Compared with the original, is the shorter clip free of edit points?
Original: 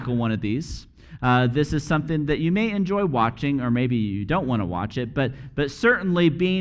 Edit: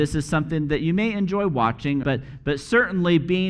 no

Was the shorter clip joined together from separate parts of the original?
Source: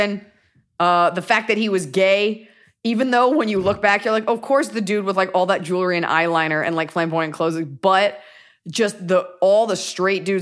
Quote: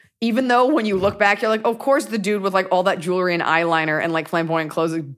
no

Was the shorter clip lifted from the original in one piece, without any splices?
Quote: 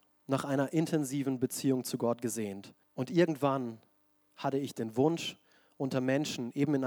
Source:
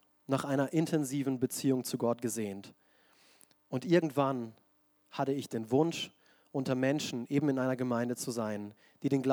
no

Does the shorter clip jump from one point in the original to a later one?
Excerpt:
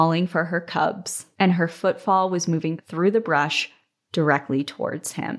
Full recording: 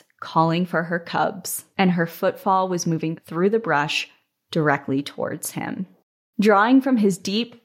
no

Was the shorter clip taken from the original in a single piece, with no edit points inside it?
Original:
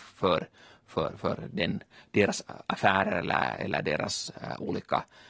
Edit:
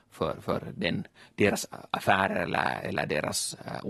yes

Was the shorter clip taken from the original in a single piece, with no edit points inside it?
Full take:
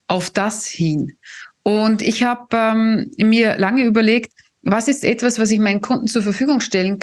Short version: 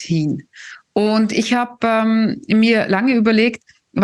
yes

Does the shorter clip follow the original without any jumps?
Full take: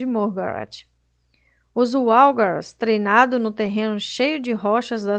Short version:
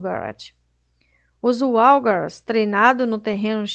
yes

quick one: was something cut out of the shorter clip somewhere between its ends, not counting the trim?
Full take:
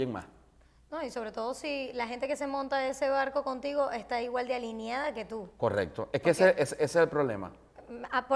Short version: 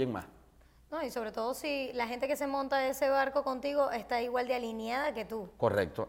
no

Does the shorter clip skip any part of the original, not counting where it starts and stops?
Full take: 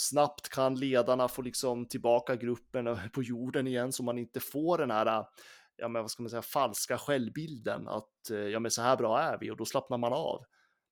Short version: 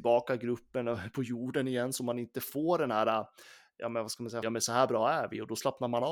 yes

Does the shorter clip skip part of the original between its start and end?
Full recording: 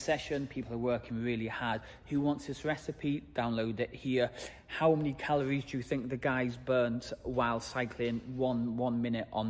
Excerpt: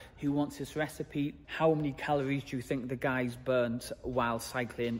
yes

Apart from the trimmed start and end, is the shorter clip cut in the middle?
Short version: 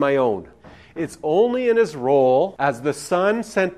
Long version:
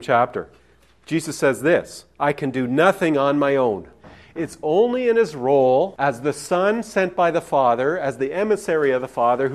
no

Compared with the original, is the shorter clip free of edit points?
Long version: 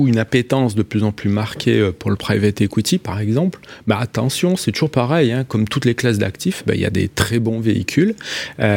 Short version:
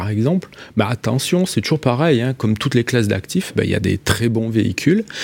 yes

